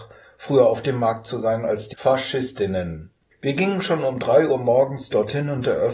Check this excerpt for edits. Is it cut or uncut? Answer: uncut